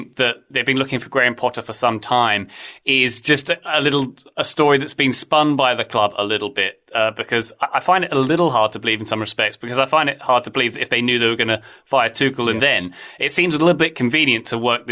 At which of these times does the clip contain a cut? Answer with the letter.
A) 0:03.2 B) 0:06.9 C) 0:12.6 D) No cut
C